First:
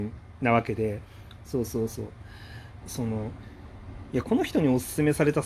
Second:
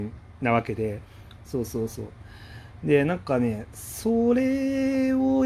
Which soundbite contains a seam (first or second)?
first